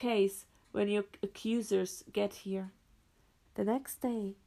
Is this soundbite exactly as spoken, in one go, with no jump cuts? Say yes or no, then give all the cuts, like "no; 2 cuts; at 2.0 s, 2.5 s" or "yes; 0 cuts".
no; 1 cut; at 3.5 s